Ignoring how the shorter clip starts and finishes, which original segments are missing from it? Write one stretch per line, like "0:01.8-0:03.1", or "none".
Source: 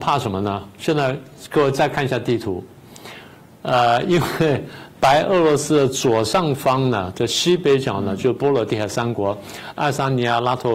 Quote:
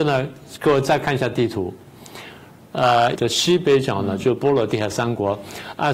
0:04.1-0:07.1